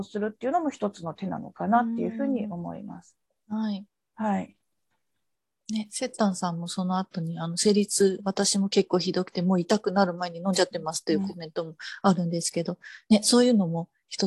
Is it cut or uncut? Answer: uncut